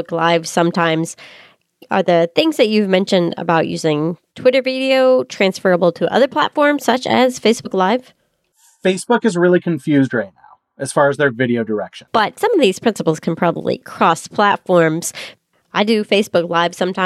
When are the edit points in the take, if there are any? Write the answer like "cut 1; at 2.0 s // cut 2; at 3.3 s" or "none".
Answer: cut 1; at 12.1 s